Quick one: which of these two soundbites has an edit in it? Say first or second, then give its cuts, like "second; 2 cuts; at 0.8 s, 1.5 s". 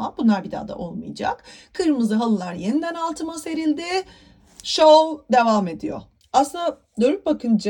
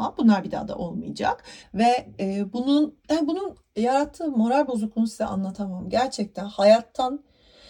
second; 2 cuts; at 1.6 s, 3.0 s